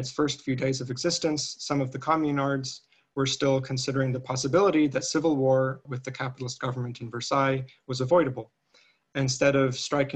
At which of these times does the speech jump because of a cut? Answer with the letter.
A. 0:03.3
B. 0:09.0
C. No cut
C